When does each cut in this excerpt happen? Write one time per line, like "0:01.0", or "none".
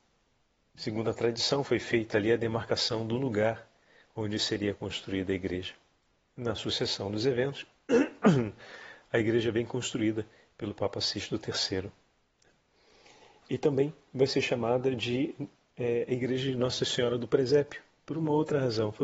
none